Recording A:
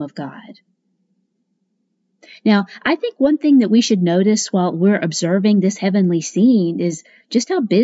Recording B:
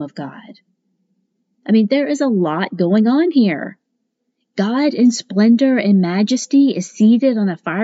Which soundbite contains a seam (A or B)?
B